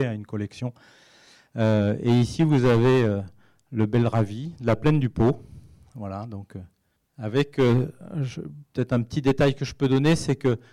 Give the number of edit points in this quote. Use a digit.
0